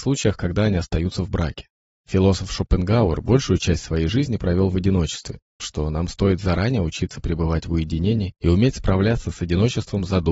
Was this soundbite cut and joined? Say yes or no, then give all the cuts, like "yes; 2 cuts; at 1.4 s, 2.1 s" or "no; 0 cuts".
yes; 2 cuts; at 1.9 s, 5.6 s